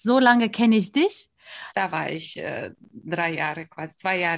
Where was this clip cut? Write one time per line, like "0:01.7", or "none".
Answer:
0:01.7